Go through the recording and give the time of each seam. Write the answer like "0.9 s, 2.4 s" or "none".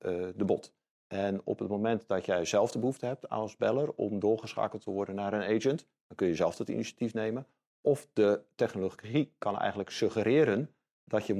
none